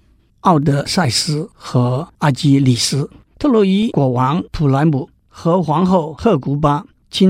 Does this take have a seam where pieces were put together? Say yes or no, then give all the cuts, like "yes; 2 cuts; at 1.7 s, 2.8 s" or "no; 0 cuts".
yes; 1 cut; at 3.3 s